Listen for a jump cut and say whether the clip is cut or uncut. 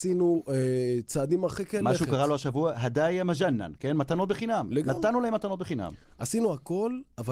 uncut